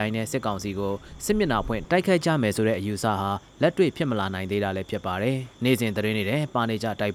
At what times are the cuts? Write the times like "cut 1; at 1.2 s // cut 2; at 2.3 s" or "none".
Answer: cut 1; at 5.5 s